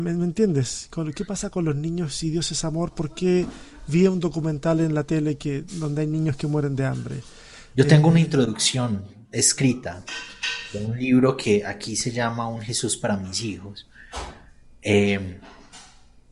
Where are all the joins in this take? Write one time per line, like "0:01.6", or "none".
none